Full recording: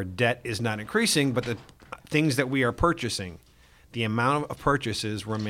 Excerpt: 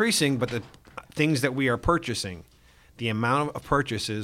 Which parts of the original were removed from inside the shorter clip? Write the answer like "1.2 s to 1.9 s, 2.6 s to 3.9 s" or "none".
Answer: none